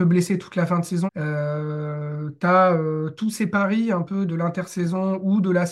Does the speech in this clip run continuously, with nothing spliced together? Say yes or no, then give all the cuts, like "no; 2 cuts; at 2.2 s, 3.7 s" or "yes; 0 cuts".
no; 2 cuts; at 1.1 s, 4.3 s